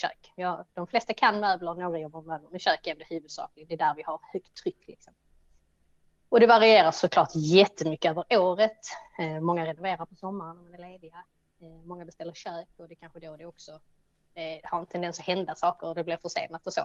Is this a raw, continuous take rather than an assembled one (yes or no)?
yes